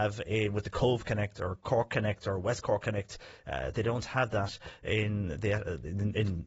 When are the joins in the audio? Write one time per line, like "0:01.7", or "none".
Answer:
none